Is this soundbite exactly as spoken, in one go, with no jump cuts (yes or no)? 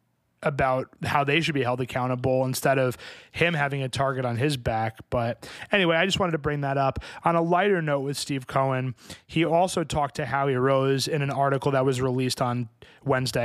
yes